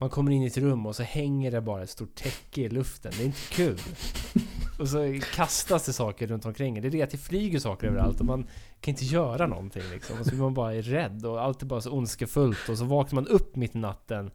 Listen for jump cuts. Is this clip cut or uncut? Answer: uncut